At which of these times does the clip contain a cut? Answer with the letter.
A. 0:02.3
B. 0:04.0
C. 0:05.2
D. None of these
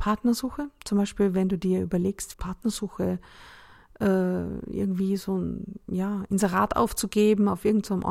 A